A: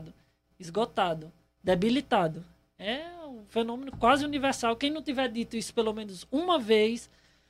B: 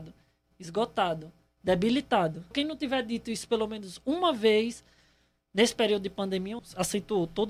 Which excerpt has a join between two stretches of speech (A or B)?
B